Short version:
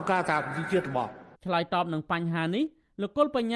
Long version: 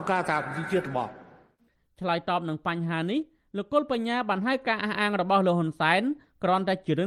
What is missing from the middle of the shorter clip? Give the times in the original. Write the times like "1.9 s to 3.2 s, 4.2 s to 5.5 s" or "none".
1.3 s to 1.9 s

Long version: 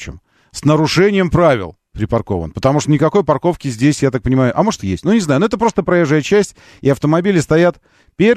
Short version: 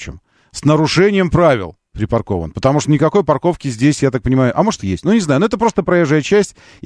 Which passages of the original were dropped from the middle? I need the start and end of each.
none

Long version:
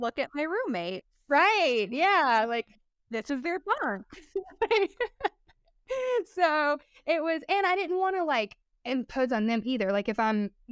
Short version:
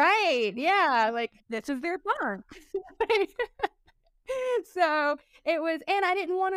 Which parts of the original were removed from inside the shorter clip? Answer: 2.7 s to 3.0 s

